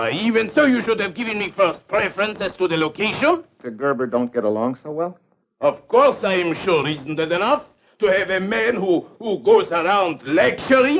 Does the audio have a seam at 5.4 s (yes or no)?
yes